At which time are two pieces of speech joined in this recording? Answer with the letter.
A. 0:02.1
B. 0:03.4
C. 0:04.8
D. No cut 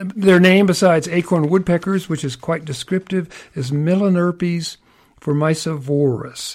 D